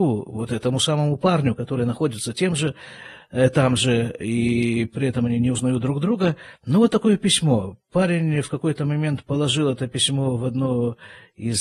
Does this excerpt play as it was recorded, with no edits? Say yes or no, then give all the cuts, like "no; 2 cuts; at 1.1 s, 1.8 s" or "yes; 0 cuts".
yes; 0 cuts